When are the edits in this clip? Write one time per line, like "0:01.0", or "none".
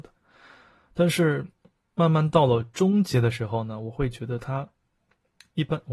none